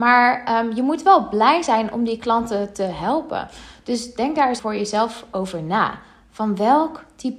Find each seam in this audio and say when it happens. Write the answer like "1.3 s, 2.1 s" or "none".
4.6 s